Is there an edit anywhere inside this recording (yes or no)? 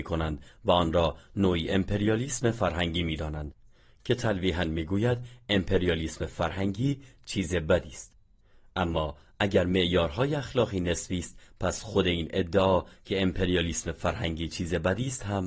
no